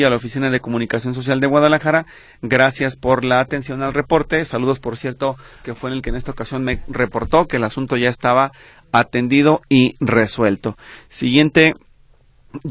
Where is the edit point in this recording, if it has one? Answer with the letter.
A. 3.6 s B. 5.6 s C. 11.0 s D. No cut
B